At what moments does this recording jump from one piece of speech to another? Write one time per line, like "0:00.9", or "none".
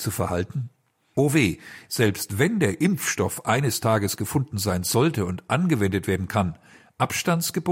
0:01.9